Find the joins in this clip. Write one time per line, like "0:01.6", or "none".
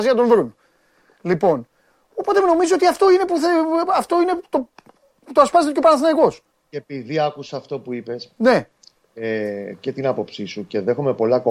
none